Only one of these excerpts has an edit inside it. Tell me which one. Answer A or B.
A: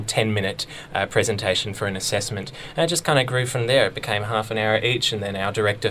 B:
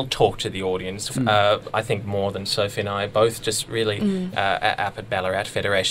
B